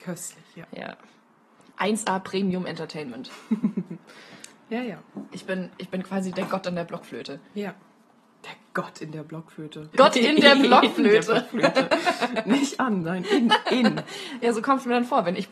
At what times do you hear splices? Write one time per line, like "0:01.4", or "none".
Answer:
0:09.9